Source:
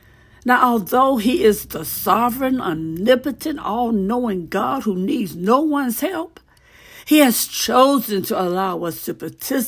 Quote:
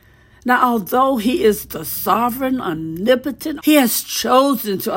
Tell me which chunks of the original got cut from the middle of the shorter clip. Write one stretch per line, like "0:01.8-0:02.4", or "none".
0:03.6-0:07.0